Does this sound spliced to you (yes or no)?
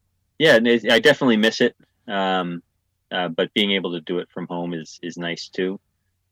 no